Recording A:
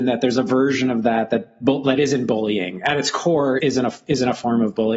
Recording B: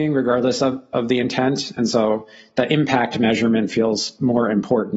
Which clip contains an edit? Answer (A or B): A